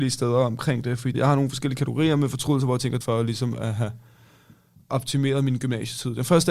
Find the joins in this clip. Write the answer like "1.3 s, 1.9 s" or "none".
1.1 s, 3.0 s

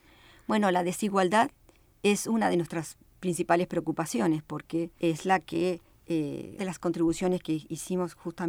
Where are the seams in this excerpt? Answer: 5.0 s, 6.6 s

